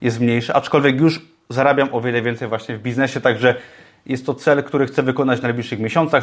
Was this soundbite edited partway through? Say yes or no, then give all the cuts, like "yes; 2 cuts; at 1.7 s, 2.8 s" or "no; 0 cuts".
no; 0 cuts